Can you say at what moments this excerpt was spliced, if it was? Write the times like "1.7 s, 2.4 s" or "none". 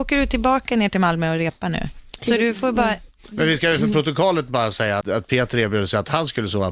2.2 s, 5.0 s